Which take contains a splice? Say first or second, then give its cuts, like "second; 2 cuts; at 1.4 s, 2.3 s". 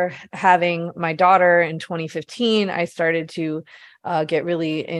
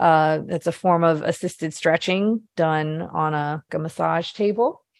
second; 1 cut; at 3.7 s